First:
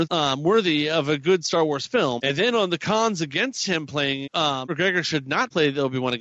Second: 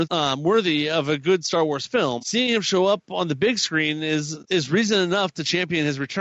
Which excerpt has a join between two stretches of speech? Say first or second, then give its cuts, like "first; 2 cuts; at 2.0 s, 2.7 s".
first; 2 cuts; at 2.2 s, 4.3 s